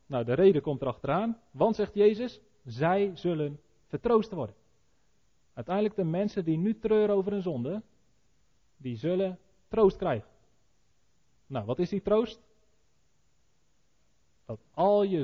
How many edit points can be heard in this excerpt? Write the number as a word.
zero